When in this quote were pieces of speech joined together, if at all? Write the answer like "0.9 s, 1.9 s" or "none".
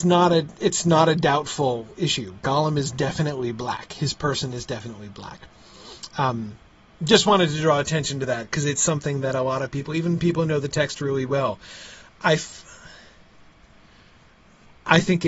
none